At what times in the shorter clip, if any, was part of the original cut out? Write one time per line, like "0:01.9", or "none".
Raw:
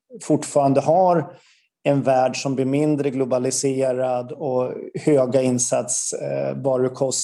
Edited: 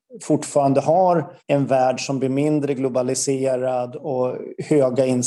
0:01.4